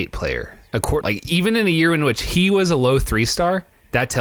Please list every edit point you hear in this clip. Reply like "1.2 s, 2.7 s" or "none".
1.0 s